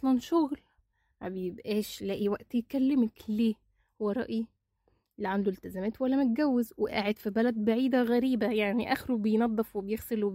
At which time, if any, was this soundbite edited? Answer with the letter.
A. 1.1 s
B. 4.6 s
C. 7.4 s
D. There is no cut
D